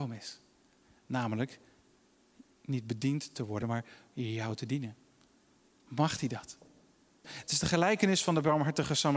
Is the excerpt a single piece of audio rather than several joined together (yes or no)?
no